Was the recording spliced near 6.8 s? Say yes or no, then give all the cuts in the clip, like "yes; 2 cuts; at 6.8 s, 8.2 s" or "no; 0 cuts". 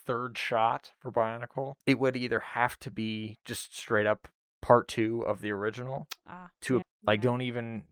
yes; 2 cuts; at 1.8 s, 6.8 s